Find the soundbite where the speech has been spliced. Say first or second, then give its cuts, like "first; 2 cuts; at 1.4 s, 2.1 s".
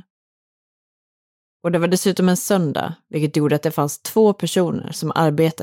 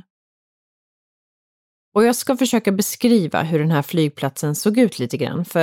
first; 1 cut; at 1.5 s